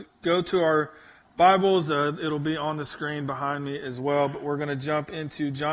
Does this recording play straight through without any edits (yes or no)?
yes